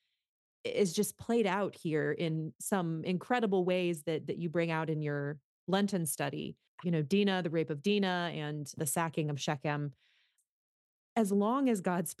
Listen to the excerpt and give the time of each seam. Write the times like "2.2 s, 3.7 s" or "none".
6.8 s